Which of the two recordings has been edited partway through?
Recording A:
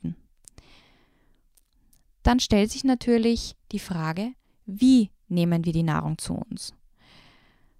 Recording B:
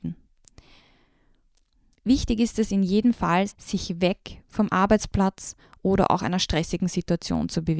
B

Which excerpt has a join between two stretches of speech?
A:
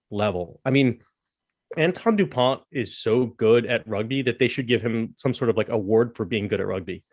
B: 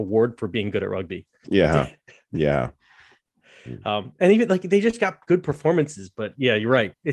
B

